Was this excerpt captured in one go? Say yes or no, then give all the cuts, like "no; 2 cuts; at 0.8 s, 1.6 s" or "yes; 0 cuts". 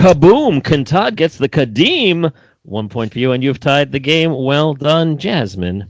yes; 0 cuts